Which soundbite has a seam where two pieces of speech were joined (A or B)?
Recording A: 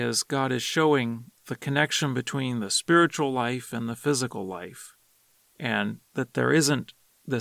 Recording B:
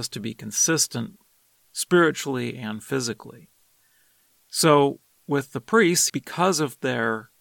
B